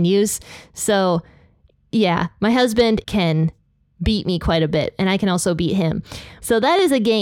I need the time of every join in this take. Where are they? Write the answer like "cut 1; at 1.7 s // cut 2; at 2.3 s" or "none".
cut 1; at 3.0 s